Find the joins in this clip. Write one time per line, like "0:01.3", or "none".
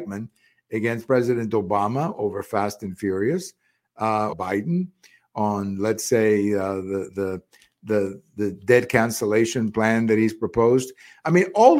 0:04.3